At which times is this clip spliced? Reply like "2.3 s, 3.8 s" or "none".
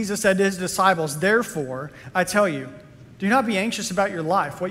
none